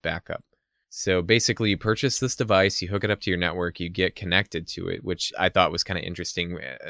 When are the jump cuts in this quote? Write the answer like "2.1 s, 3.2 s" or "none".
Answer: 5.3 s